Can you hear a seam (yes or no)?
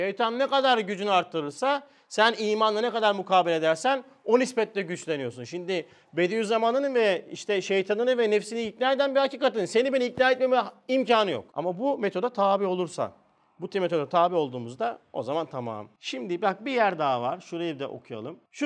no